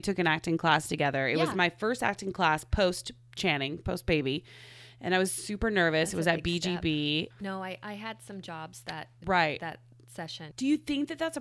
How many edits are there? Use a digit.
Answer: 2